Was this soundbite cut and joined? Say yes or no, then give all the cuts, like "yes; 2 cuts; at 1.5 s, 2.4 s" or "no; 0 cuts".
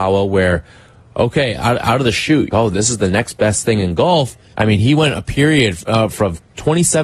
yes; 2 cuts; at 2.5 s, 4.5 s